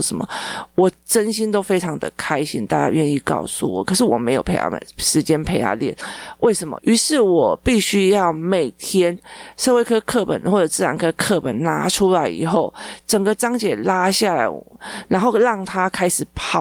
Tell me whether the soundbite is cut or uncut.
cut